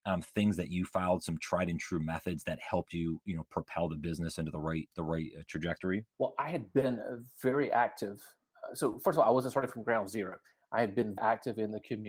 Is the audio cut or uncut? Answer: cut